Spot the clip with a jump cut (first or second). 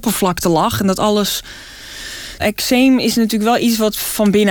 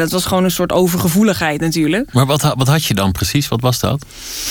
first